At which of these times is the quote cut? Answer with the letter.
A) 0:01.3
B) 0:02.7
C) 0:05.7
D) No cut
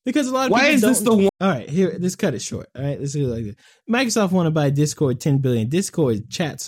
A